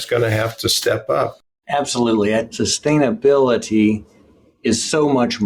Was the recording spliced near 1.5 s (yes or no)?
no